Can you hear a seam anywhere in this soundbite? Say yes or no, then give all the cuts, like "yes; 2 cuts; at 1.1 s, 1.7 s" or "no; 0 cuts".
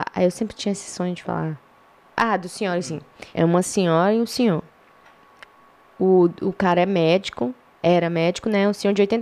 yes; 1 cut; at 3.3 s